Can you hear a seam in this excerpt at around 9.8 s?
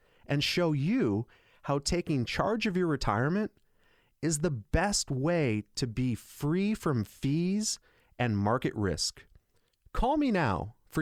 no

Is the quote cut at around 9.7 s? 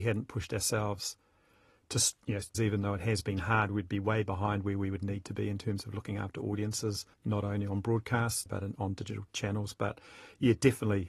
no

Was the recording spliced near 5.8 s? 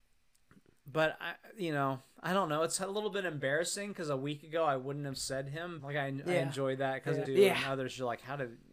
yes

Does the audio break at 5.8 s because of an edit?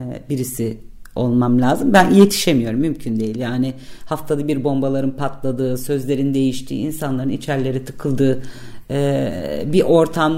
no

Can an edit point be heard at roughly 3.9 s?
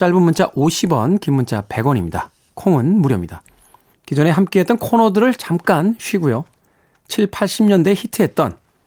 yes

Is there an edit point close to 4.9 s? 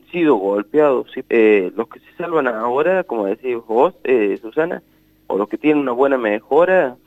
no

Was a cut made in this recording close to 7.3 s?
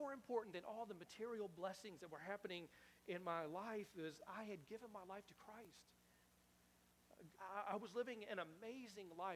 yes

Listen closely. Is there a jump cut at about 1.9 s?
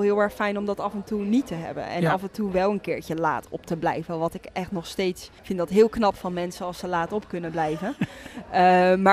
no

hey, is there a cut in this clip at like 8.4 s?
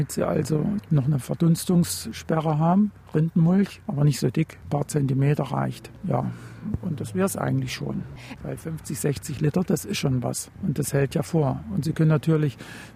yes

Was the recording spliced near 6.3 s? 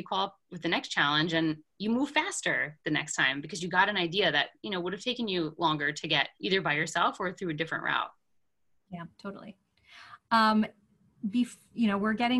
yes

